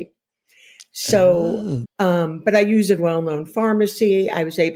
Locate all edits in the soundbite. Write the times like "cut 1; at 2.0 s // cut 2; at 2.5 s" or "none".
cut 1; at 1.8 s // cut 2; at 3.0 s